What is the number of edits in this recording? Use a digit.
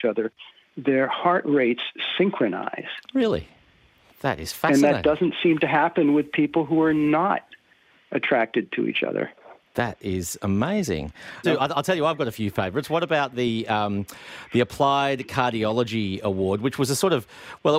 1